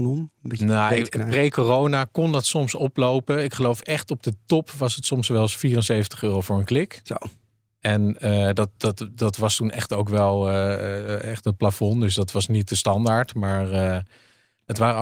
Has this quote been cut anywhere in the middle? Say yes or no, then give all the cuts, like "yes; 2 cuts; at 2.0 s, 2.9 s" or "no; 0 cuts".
no; 0 cuts